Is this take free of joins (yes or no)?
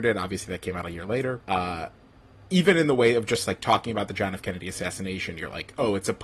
no